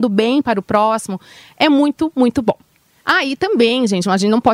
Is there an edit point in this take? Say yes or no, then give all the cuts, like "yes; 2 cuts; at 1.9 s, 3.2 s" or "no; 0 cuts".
no; 0 cuts